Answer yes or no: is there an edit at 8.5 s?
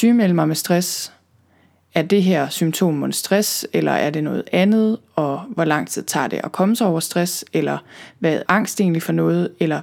yes